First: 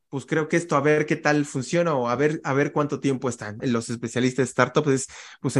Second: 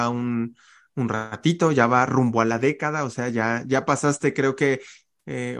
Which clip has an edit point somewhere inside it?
first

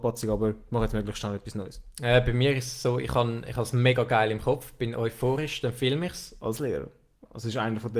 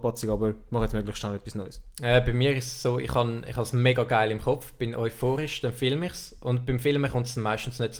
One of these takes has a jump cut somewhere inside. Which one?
first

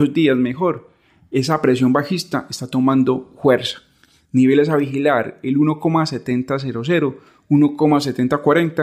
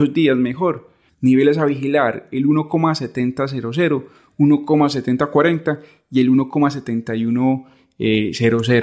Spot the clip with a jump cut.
second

